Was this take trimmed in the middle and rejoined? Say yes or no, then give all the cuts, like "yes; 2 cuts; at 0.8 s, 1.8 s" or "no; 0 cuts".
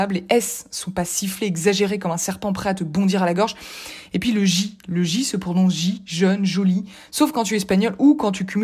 no; 0 cuts